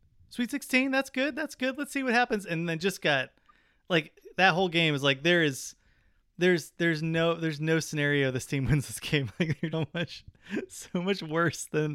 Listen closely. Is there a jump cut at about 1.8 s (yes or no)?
no